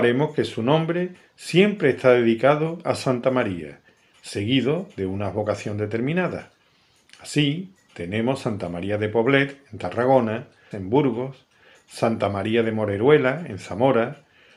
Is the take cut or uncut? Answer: cut